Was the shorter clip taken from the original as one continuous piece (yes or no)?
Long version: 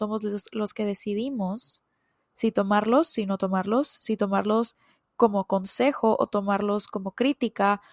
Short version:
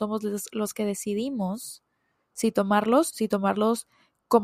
no